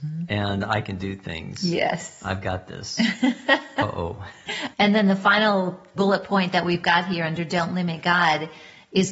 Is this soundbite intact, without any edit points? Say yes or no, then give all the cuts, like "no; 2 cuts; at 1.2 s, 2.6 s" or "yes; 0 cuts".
no; 2 cuts; at 4.7 s, 6.0 s